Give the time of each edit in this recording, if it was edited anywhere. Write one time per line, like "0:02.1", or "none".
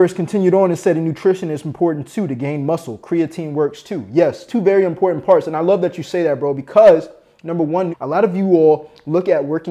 0:04.5
0:07.9